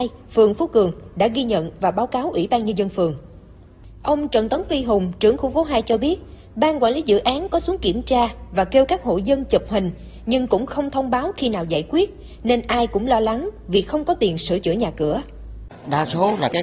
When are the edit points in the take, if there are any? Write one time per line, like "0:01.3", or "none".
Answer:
none